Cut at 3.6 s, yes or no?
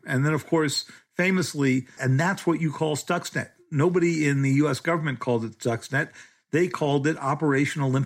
no